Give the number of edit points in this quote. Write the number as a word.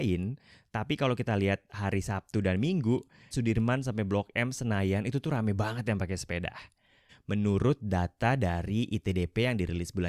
two